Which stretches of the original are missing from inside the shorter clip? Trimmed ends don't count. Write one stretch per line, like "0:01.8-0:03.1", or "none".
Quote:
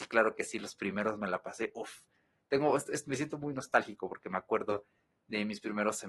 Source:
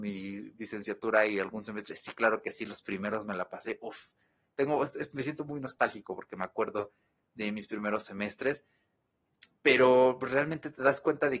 none